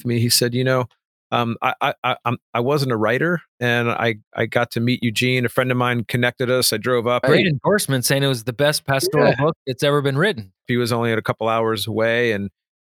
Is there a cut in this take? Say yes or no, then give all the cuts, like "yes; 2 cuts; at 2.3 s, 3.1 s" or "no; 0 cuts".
yes; 2 cuts; at 7.2 s, 10.7 s